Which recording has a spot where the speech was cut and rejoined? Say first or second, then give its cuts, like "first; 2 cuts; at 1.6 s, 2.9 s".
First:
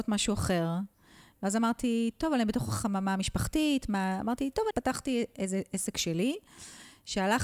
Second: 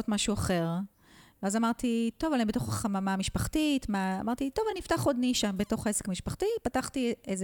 first; 1 cut; at 4.7 s